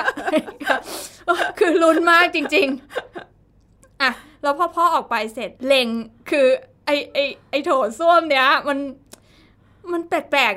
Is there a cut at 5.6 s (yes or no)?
yes